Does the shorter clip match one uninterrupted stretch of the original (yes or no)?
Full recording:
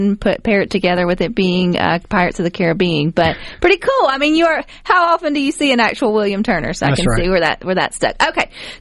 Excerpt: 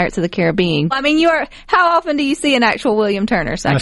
no